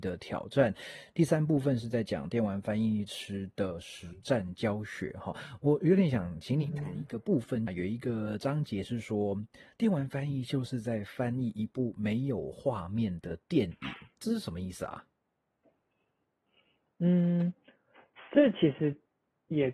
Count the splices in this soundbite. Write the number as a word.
one